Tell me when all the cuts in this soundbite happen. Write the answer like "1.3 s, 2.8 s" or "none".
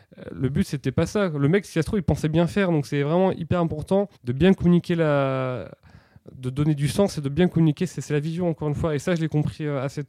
4.2 s